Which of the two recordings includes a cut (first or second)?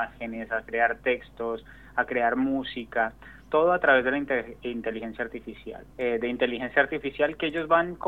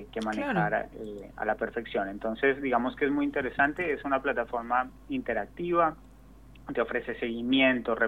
first